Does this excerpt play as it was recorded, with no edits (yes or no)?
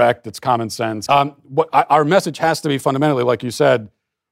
no